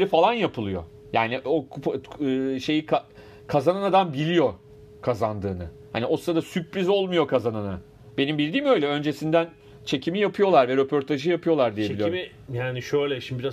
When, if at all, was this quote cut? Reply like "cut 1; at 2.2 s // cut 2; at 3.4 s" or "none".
none